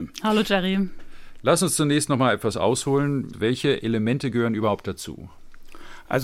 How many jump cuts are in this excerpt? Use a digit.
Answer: 1